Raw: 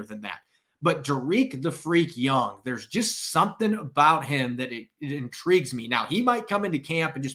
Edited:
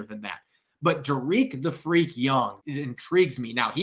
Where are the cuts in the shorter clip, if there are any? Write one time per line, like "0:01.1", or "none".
0:02.6